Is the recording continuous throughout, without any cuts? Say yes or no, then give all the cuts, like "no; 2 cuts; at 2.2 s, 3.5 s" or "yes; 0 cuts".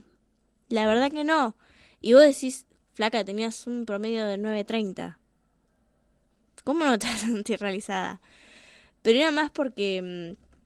yes; 0 cuts